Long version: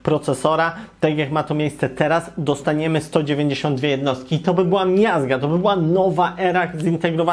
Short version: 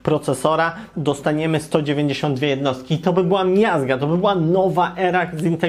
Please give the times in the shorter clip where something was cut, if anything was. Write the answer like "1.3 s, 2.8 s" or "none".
0.9 s